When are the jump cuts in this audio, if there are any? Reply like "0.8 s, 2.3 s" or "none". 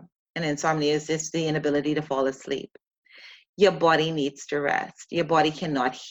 none

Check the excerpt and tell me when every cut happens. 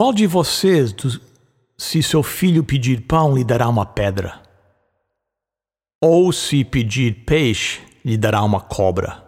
none

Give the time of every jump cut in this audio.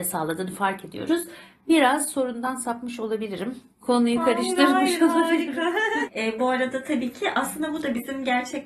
6.1 s

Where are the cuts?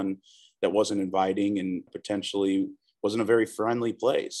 1.9 s

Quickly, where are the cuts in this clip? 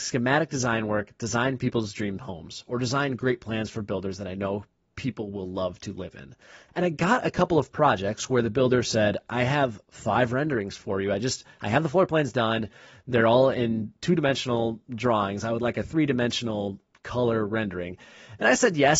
6.7 s

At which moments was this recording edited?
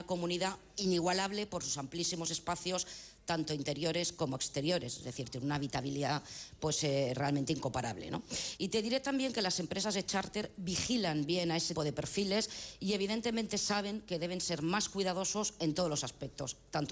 8.6 s, 11.7 s

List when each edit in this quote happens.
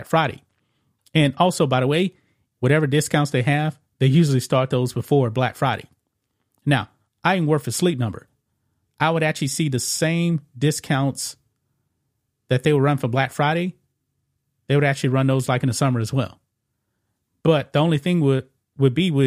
2.5 s

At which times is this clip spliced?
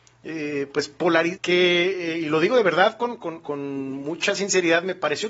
1.4 s

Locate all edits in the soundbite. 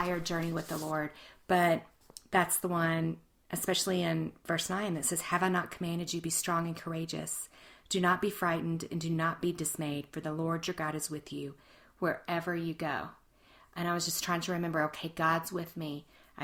none

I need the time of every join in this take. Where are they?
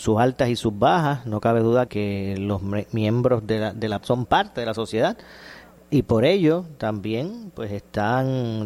1.9 s, 4.0 s

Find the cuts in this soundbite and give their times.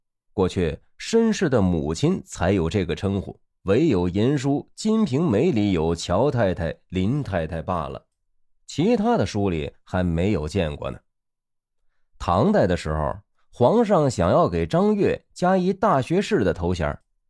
3.5 s

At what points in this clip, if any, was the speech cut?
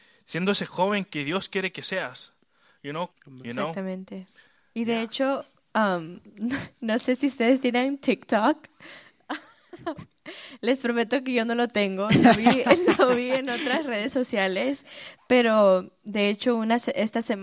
3.1 s

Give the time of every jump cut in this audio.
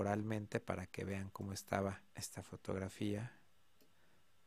2.1 s

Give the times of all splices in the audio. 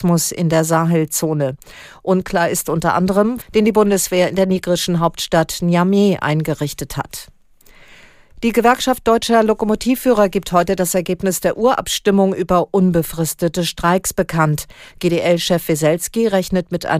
3.4 s

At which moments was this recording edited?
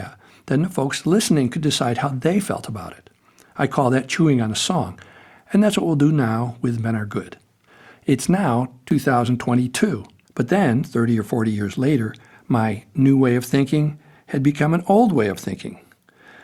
7.9 s, 10.3 s

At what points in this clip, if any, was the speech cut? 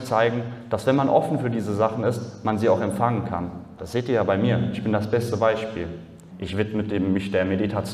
3.8 s, 6.3 s

